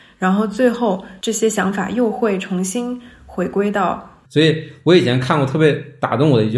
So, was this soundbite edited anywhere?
yes; 1 cut; at 4.3 s

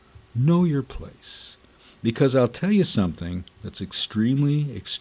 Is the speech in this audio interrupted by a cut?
no; 0 cuts

